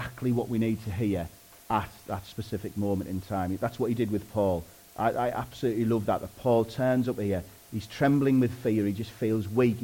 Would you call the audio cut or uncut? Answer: uncut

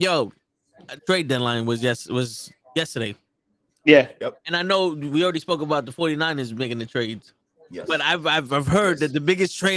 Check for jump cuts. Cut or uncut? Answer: cut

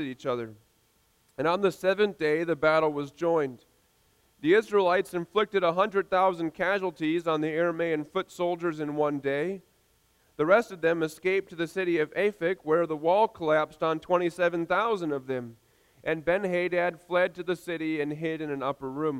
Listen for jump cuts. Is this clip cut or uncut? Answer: uncut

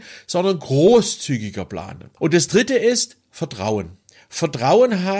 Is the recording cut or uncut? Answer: cut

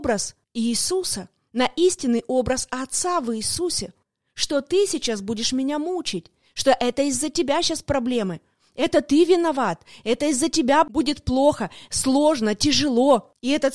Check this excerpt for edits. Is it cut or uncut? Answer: uncut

